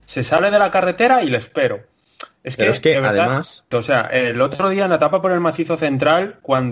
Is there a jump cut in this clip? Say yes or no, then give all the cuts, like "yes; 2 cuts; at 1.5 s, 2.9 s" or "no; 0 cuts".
yes; 1 cut; at 3.7 s